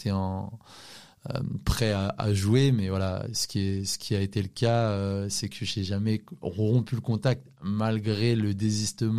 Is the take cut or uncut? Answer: uncut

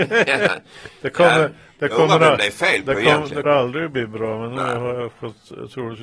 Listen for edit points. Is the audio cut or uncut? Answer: cut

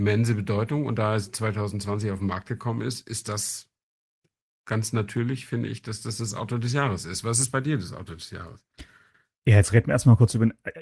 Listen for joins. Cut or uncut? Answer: uncut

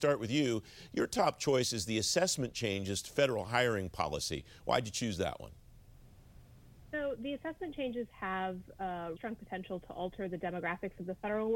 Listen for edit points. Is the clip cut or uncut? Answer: cut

